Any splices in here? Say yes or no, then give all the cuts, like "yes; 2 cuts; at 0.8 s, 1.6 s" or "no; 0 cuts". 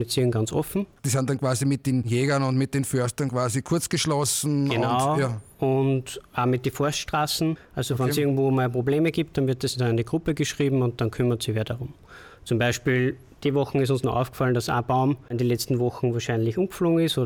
no; 0 cuts